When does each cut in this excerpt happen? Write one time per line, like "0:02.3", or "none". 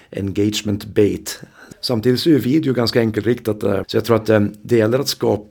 0:01.7
0:03.8